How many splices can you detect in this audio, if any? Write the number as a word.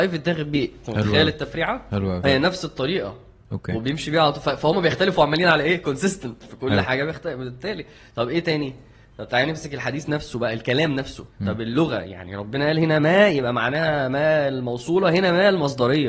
two